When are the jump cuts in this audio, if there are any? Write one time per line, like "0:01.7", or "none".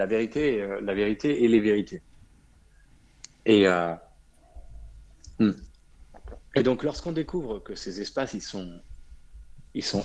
none